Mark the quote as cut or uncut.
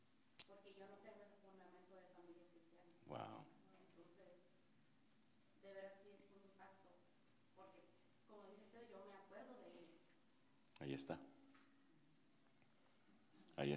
uncut